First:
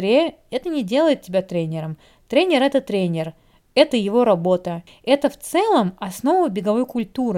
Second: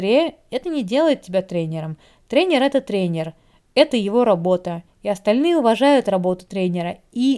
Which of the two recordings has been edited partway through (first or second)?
first